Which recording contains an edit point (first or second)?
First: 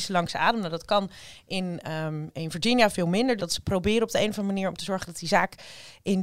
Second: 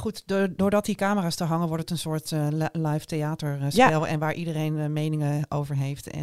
first